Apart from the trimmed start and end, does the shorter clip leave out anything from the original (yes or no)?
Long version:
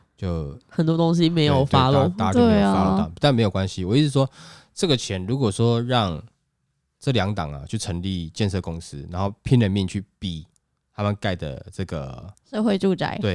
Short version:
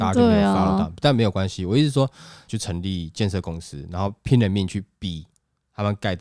yes